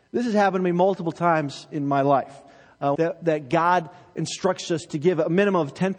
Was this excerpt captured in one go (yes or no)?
no